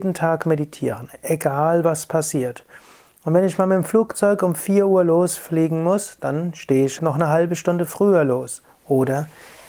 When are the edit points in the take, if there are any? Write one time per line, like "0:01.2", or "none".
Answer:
0:07.0